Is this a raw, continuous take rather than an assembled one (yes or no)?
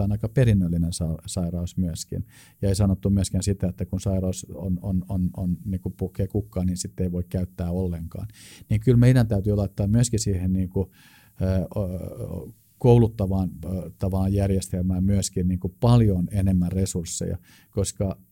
yes